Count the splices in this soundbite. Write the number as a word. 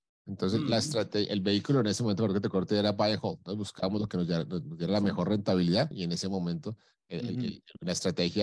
one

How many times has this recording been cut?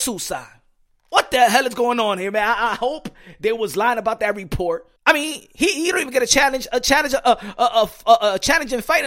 one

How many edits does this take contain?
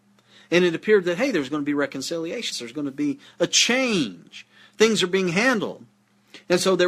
one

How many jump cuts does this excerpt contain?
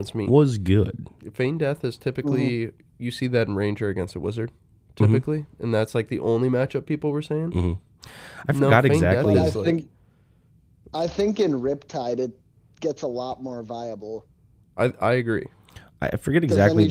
zero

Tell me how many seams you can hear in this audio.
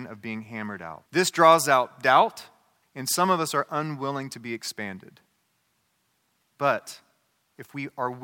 two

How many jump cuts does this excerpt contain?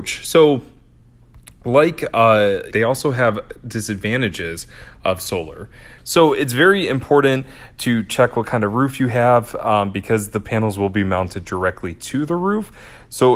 two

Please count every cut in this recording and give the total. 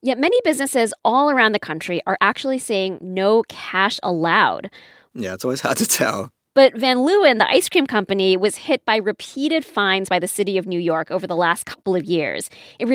one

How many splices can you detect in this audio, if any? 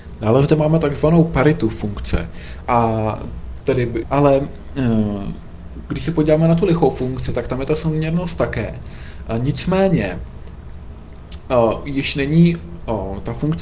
two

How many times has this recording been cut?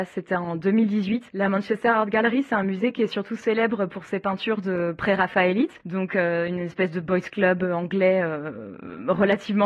zero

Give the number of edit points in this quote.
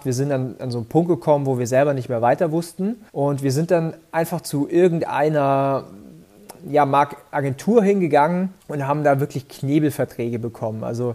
two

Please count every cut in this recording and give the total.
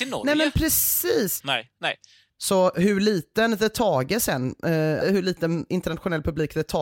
two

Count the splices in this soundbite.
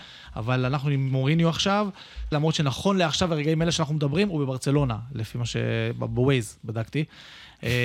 one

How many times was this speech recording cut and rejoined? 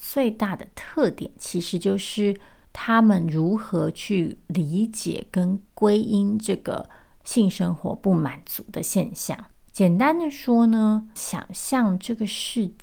one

